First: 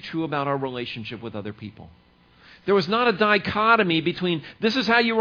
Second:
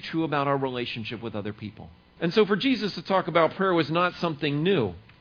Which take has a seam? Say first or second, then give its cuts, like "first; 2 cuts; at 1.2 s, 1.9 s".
second; 1 cut; at 2.2 s